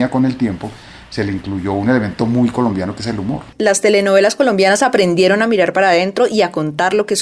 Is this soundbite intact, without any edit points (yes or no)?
no